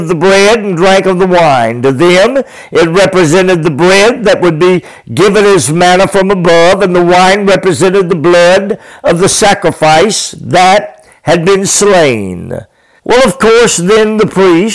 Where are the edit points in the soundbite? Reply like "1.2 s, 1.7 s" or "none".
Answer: 13.0 s